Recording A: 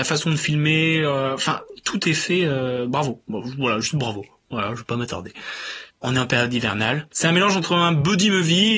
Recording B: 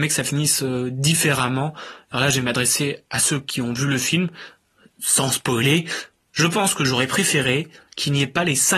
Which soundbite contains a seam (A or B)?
A